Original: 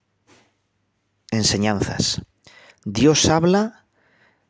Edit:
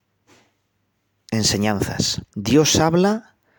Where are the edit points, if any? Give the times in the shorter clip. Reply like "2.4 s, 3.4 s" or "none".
2.3 s